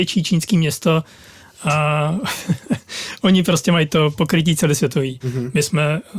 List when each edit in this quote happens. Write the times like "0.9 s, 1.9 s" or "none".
5.2 s